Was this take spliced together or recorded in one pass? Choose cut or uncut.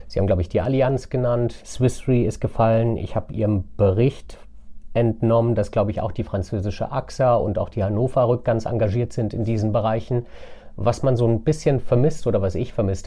cut